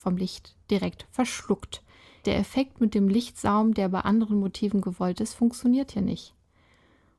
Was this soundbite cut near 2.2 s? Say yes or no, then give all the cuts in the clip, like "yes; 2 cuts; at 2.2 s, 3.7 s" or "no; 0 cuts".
yes; 1 cut; at 2.2 s